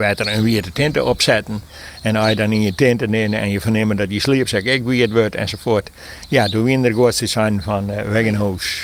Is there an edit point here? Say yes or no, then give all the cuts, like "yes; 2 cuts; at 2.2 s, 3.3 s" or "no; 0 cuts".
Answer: no; 0 cuts